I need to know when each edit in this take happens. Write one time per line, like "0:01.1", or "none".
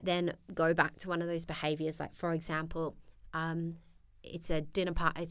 none